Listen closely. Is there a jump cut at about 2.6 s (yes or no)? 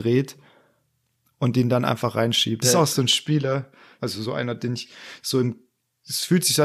yes